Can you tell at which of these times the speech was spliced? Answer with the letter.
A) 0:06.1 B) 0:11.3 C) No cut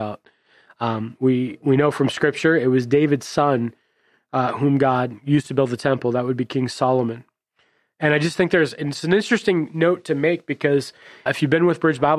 B